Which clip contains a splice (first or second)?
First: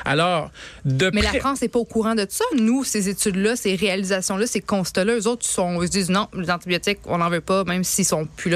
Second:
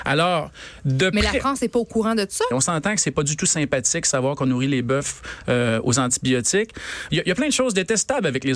second